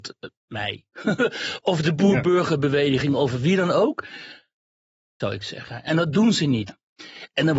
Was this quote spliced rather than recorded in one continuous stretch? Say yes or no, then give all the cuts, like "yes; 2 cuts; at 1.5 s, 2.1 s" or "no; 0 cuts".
yes; 2 cuts; at 5.2 s, 6.7 s